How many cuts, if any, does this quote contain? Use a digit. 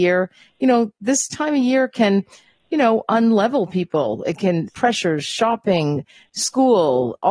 1